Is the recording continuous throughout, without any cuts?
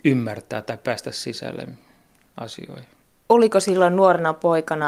yes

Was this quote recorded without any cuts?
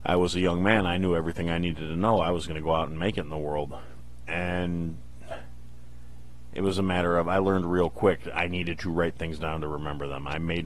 yes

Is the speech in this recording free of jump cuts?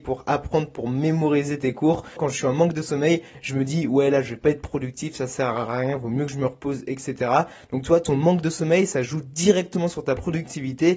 no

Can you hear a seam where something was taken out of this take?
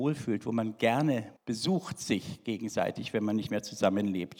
yes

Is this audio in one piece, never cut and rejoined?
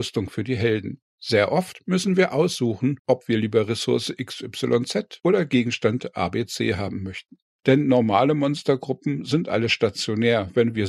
no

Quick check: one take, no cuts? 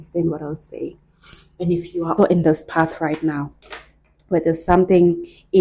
no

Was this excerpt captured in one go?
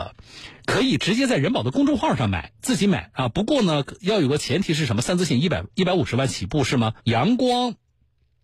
no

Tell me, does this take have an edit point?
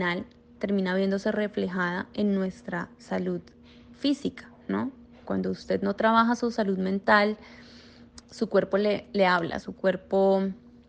yes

